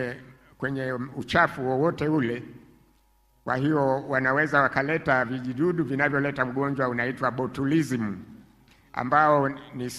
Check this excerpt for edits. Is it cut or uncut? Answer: uncut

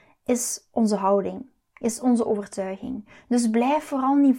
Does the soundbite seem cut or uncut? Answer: uncut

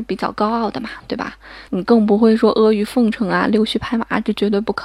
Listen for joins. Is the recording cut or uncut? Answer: cut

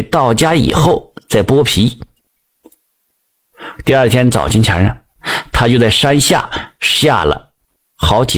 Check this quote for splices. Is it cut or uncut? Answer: cut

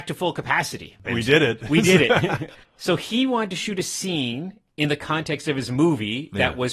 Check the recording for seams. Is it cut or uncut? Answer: cut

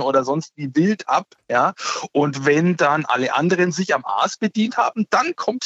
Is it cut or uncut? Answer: uncut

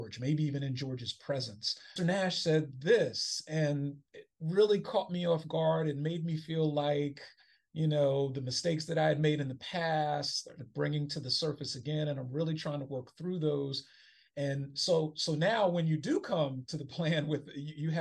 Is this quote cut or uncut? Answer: cut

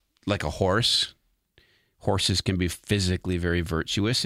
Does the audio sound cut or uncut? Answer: uncut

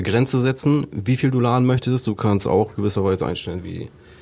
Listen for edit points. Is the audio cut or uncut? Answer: uncut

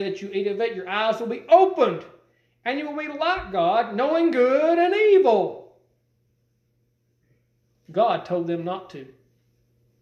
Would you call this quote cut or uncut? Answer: uncut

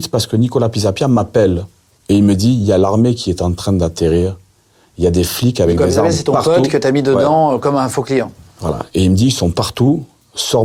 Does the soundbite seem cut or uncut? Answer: uncut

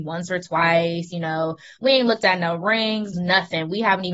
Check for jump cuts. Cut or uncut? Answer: cut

